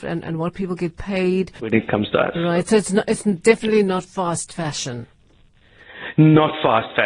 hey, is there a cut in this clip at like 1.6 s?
yes; 1 cut; at 1.6 s

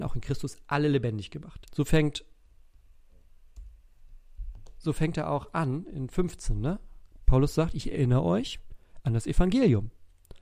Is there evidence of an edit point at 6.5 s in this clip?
no; 1 cut; at 1.6 s

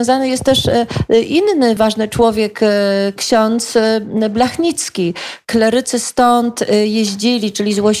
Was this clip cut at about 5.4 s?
yes; 2 cuts; at 1.8 s, 5.4 s

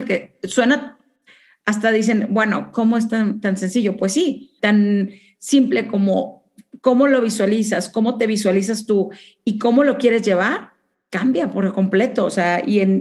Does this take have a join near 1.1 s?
no; 1 cut; at 4.6 s

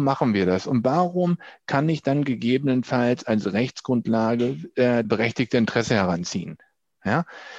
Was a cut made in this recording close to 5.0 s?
yes; 1 cut; at 5.0 s

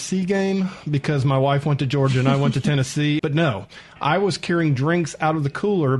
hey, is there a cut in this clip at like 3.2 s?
yes; 1 cut; at 3.2 s

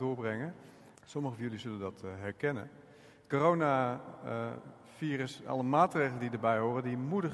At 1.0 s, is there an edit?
yes; 1 cut; at 1.0 s

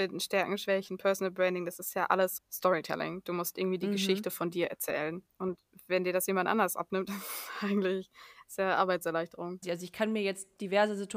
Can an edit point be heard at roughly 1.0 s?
no; 3 cuts; at 2.4 s, 5.3 s, 9.6 s

